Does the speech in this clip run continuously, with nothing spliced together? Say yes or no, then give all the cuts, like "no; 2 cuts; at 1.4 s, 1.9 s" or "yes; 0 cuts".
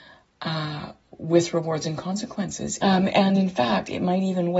no; 1 cut; at 2.8 s